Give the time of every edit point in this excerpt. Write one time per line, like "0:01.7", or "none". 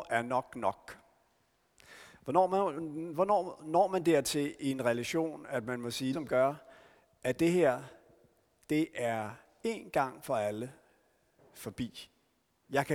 0:06.1